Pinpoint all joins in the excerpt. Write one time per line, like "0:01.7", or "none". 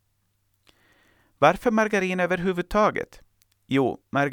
none